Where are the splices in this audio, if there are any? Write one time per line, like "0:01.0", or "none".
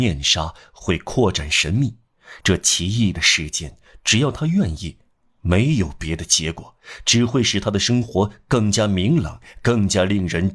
0:02.4